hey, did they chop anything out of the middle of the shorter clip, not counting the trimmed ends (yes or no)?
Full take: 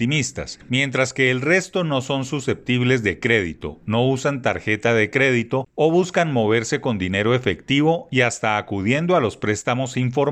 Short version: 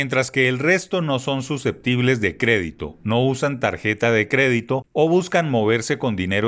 no